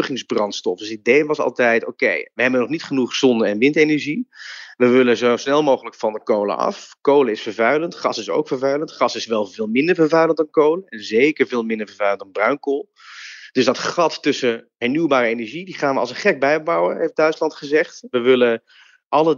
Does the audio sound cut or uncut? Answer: uncut